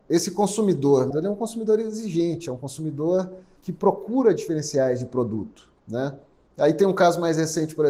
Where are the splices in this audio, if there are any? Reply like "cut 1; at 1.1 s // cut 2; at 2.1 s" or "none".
cut 1; at 1.1 s